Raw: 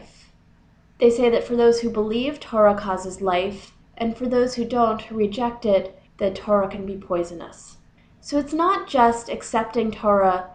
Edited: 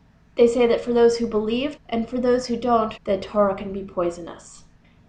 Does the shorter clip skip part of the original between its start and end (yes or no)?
yes